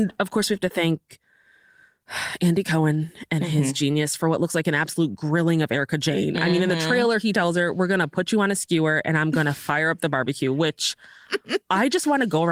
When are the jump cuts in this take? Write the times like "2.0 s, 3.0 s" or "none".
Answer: none